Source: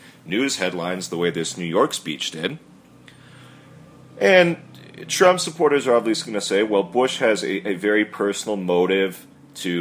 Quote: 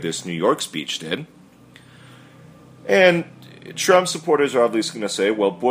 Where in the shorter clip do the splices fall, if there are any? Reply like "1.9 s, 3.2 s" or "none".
none

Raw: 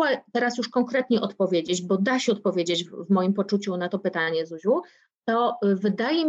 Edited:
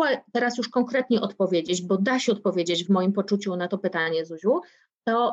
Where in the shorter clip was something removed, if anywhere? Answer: 2.9 s

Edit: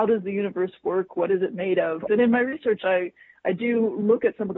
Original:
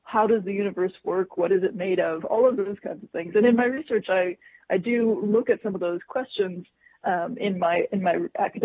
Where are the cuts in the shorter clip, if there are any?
2.1 s

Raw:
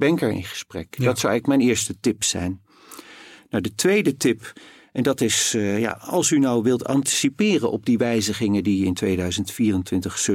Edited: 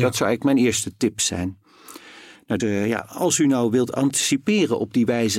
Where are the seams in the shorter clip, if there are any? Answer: 2.6 s

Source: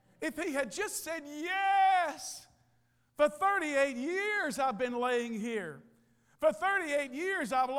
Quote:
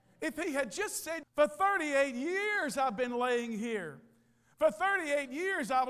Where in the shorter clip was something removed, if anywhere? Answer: 1.2 s

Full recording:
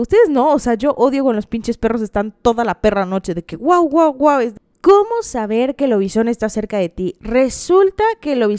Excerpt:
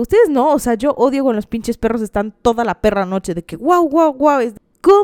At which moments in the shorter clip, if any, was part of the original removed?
none

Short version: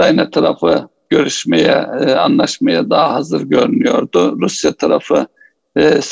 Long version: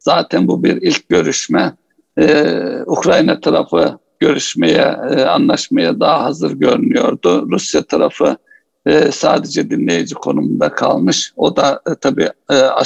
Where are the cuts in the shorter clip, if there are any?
none

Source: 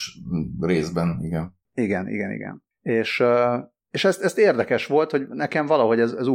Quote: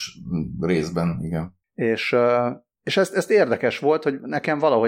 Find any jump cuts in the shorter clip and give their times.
1.6 s

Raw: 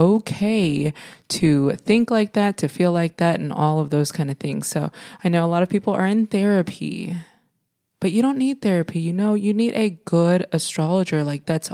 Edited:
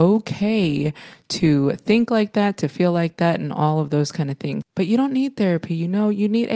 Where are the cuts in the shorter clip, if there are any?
4.6 s

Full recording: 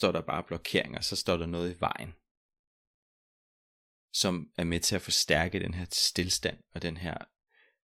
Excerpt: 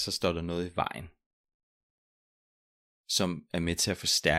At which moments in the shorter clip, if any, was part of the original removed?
none

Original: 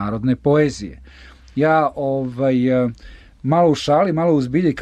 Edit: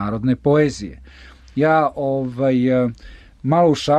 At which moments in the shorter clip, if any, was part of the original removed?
none

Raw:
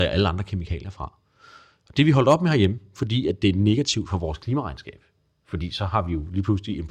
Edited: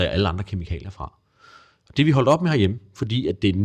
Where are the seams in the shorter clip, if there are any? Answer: none

